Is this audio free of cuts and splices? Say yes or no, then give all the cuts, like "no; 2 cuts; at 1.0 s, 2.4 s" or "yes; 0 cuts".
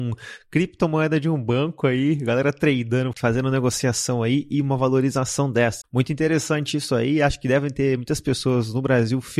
no; 2 cuts; at 3.1 s, 5.8 s